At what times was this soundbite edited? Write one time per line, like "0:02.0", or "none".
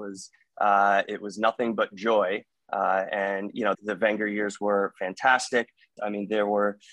0:03.7
0:06.0